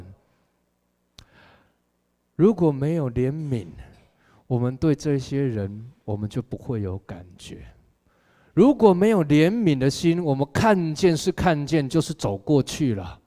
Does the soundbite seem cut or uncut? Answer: uncut